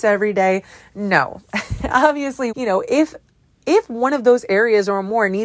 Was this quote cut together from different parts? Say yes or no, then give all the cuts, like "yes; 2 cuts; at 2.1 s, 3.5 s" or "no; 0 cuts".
yes; 1 cut; at 2.5 s